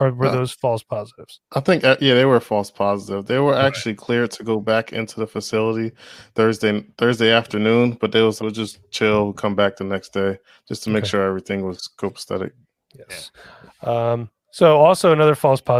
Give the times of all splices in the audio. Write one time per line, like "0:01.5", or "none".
0:08.4